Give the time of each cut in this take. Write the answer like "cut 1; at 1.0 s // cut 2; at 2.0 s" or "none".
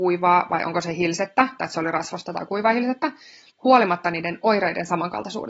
cut 1; at 1.6 s // cut 2; at 3.5 s